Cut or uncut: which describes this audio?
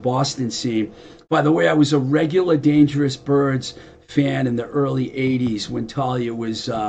uncut